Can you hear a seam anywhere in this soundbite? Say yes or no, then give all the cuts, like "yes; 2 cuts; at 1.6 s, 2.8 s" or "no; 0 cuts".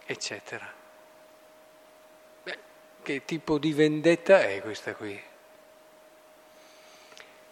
no; 0 cuts